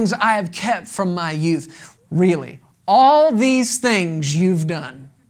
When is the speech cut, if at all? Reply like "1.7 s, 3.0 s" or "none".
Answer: 2.0 s